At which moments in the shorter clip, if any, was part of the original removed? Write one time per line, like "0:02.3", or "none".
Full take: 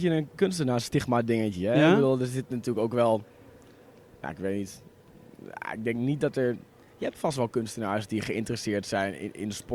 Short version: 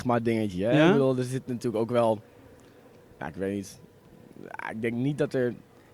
none